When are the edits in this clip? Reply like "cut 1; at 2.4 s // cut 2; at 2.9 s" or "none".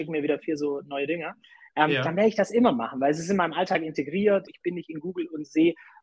cut 1; at 4.5 s